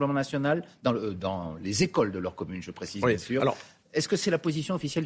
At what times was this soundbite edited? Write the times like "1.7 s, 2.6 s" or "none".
none